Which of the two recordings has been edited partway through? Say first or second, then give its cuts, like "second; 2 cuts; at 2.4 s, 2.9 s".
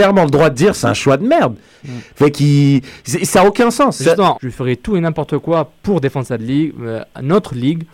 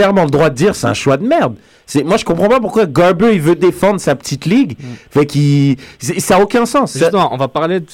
first; 2 cuts; at 1.8 s, 4.3 s